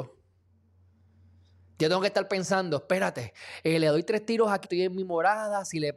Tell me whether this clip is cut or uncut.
cut